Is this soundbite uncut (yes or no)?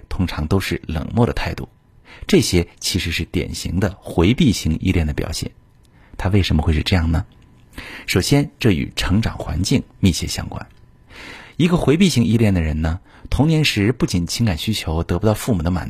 yes